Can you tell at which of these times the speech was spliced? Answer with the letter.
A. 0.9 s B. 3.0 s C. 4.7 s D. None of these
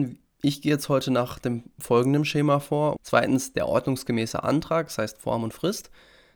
B